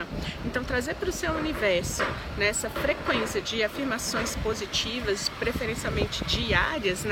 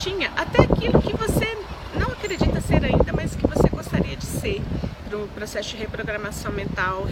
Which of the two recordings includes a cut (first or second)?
second